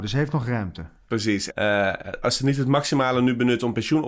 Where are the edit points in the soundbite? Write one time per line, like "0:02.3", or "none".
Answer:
0:01.5